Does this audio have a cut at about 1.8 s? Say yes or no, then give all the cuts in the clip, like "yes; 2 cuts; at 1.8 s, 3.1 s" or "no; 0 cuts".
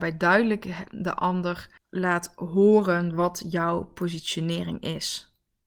yes; 1 cut; at 1.8 s